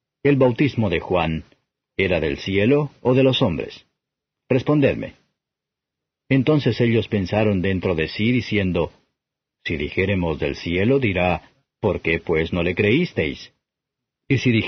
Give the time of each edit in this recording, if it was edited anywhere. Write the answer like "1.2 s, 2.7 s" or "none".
none